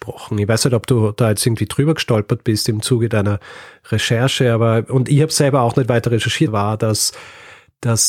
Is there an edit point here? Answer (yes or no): yes